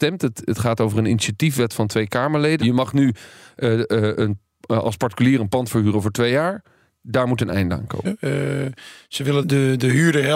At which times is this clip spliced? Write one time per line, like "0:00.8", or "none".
0:02.6
0:08.1
0:09.4